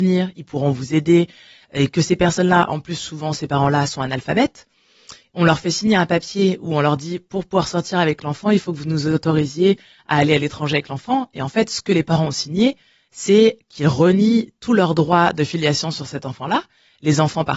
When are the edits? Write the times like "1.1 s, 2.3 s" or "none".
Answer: none